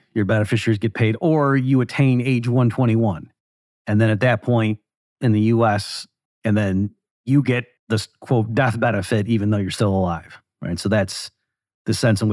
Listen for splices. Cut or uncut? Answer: cut